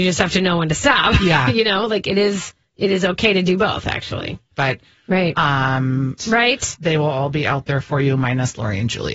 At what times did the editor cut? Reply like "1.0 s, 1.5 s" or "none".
4.5 s, 6.2 s